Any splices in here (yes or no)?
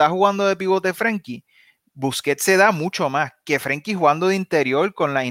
no